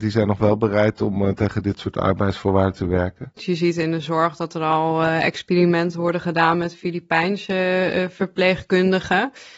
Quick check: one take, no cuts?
no; 1 cut; at 3.4 s

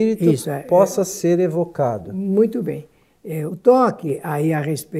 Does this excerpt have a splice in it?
yes; 1 cut; at 3.5 s

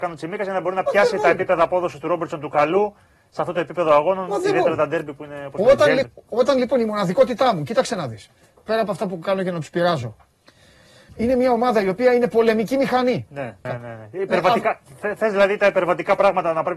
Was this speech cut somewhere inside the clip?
yes; 3 cuts; at 6.0 s, 11.1 s, 13.7 s

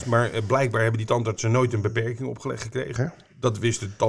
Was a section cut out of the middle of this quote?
yes; 1 cut; at 3.0 s

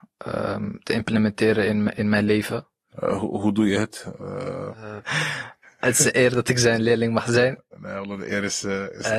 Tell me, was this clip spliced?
yes; 2 cuts; at 2.9 s, 5.0 s

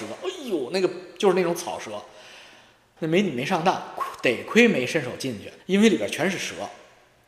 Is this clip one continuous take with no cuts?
no; 2 cuts; at 3.0 s, 5.6 s

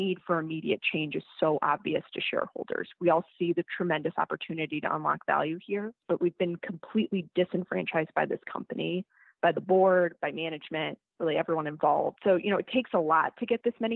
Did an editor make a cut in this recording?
no; 0 cuts

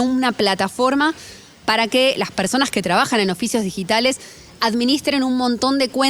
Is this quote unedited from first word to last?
yes; 0 cuts

